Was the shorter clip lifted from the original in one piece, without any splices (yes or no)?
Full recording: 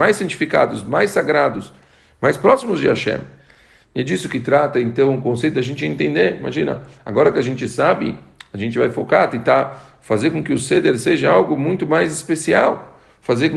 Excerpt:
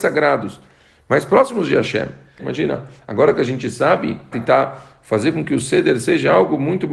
no